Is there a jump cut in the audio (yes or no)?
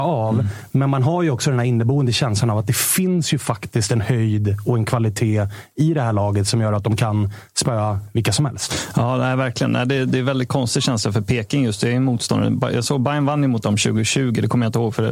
no